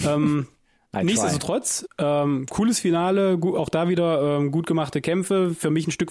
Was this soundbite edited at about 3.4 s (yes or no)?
no